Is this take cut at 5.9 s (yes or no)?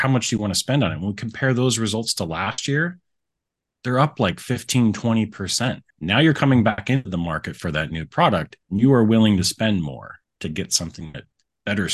yes